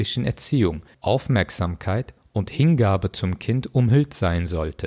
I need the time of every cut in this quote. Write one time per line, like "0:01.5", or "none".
0:00.9